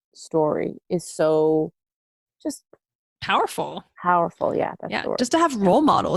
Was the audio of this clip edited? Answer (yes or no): no